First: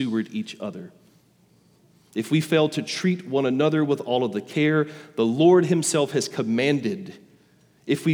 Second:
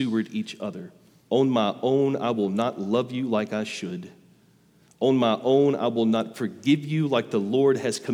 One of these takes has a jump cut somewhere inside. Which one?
second; 1 cut; at 1.3 s

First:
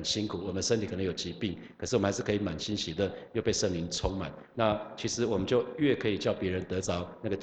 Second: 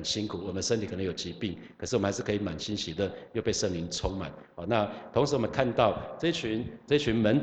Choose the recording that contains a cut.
first; 1 cut; at 4.5 s

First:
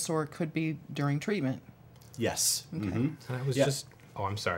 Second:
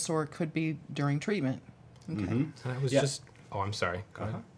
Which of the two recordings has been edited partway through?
second; 1 cut; at 2.0 s

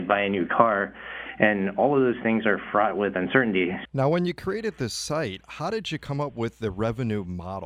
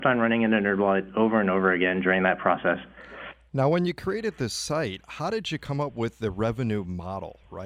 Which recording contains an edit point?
first; 1 cut; at 3.9 s

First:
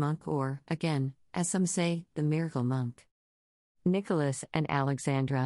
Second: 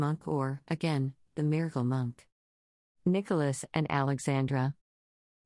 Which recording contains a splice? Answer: second; 1 cut; at 1.3 s

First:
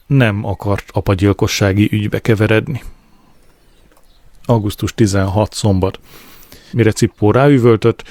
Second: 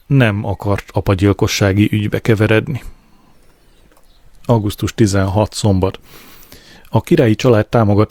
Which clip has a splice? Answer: first; 1 cut; at 6.7 s

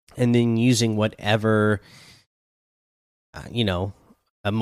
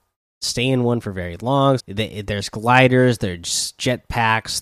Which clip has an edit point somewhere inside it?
second; 1 cut; at 1.8 s

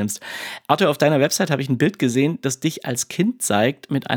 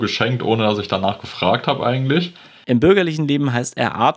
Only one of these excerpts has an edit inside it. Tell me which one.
second; 1 cut; at 2.6 s

